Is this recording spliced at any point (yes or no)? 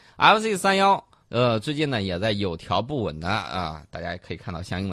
no